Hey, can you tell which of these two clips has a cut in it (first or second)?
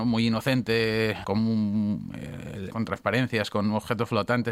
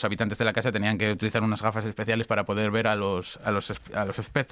first